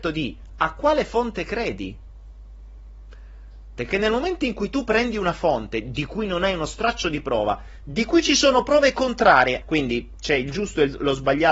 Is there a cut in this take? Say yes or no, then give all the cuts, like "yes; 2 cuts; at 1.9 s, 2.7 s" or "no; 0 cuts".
yes; 2 cuts; at 3.8 s, 9.6 s